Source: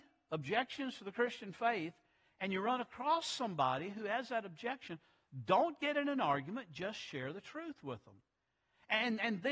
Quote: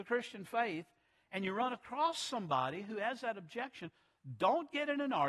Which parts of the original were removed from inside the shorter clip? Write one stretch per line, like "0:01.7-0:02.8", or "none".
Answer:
none